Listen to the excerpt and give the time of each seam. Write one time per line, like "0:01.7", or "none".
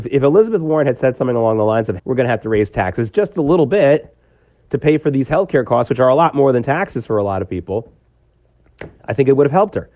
0:02.0